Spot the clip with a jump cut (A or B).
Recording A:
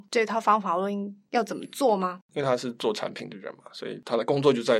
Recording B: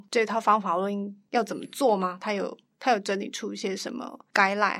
A